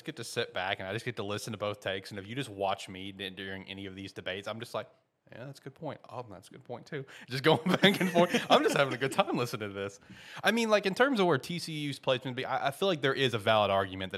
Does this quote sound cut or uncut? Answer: uncut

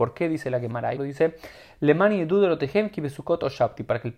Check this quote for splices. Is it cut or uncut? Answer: cut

